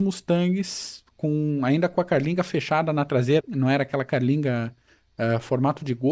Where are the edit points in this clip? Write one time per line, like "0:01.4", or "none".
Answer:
0:03.4